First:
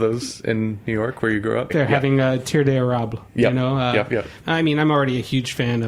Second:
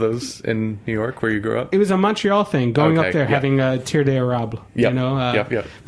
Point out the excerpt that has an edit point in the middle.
first; 2 cuts; at 1.7 s, 4.4 s

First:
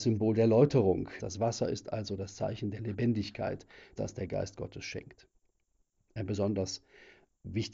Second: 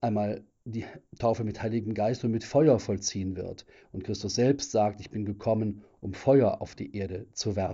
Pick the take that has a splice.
first; 2 cuts; at 1.2 s, 4.0 s

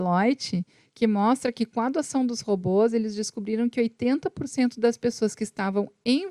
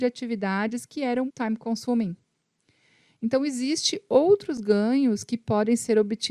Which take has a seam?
second; 1 cut; at 1.3 s

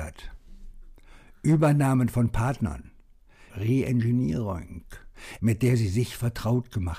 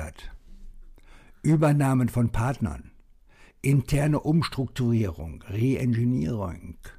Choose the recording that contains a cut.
first; 2 cuts; at 3.5 s, 5.4 s

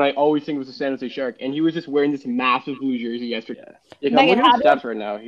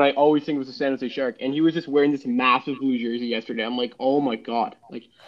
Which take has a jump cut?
first; 1 cut; at 3.5 s

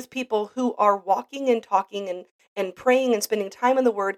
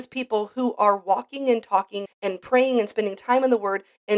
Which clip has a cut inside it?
second; 1 cut; at 2.1 s

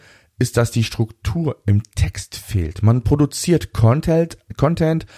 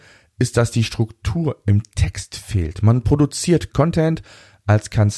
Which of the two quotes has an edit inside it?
second; 1 cut; at 3.7 s

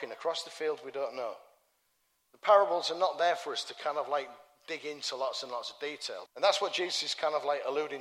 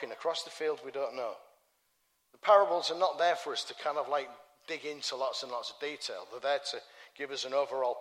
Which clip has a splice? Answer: first; 1 cut; at 6.3 s

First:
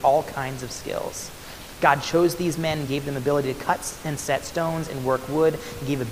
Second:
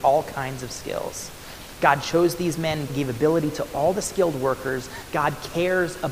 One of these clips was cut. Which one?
second; 1 cut; at 2.9 s

